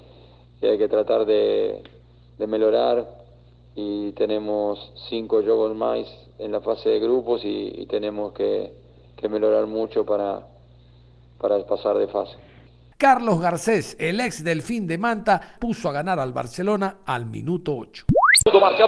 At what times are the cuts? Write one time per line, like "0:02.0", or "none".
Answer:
0:12.9
0:15.6